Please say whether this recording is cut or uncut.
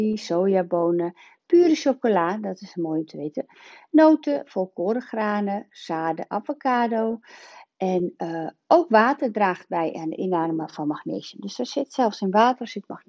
uncut